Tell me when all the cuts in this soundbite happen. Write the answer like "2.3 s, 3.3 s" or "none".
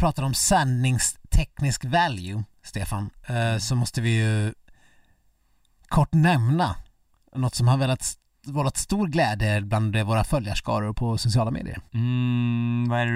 11.9 s